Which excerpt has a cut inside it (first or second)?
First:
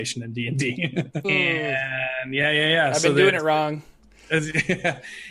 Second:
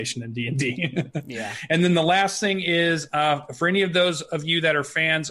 first